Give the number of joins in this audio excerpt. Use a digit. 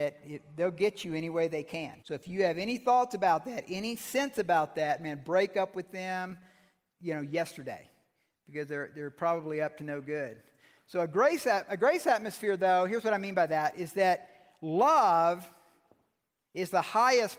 1